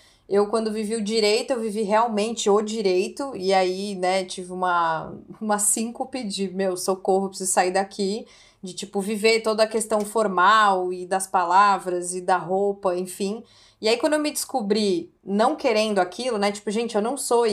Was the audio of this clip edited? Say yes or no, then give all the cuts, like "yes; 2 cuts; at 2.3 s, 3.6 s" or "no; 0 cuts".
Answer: no; 0 cuts